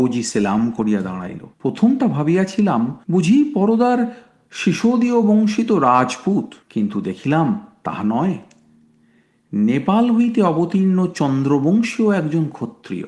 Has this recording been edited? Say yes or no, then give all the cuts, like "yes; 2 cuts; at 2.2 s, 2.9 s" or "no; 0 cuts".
yes; 3 cuts; at 1.5 s, 3.0 s, 6.6 s